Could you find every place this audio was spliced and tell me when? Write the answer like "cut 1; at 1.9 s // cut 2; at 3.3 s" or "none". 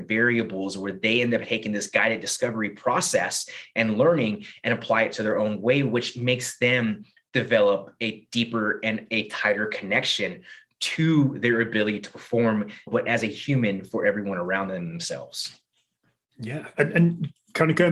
cut 1; at 12.9 s